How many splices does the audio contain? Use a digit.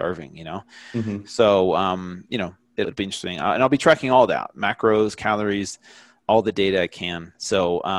1